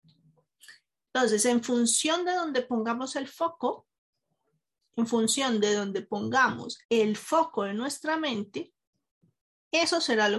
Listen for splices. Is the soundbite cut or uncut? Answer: cut